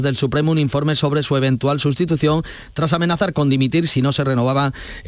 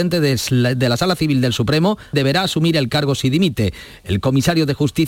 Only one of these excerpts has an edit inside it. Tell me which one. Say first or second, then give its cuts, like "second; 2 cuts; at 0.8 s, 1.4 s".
second; 1 cut; at 2.1 s